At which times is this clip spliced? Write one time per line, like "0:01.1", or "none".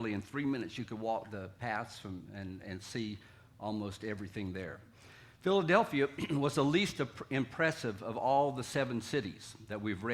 none